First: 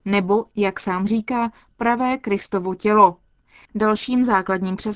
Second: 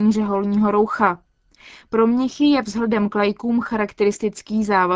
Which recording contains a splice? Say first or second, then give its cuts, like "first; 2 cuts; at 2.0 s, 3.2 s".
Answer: first; 1 cut; at 3.7 s